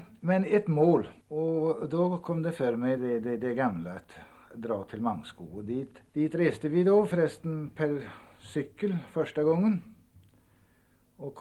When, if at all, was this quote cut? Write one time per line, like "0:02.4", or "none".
0:01.2
0:03.0
0:06.1